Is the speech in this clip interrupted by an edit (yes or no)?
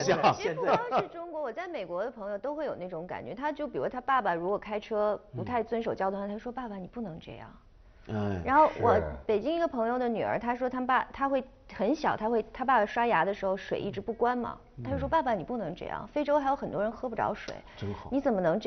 no